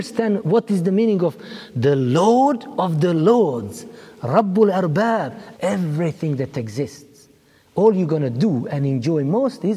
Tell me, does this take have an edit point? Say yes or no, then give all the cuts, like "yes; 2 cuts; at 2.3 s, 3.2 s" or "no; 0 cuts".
yes; 1 cut; at 5.5 s